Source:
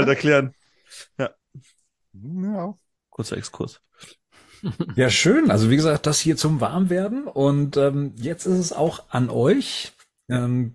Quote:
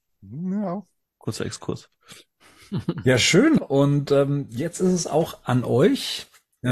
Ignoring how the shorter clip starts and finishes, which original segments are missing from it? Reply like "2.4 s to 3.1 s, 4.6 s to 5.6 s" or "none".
5.5 s to 7.2 s